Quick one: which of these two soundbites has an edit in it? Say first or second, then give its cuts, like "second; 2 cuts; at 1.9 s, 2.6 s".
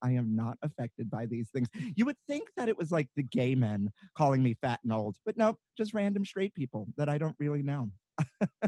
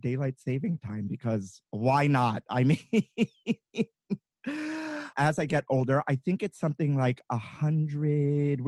second; 2 cuts; at 1.7 s, 5.1 s